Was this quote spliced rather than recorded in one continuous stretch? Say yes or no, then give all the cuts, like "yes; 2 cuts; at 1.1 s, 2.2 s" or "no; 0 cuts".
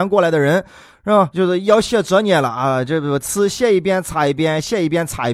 no; 0 cuts